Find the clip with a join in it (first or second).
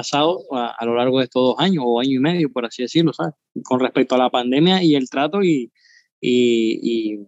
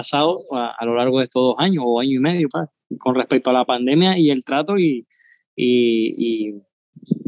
second